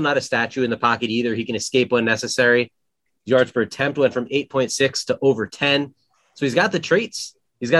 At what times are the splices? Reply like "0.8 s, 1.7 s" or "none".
3.2 s